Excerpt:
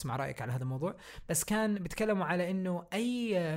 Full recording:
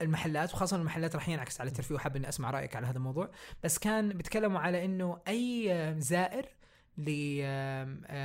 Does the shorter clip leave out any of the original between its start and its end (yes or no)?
no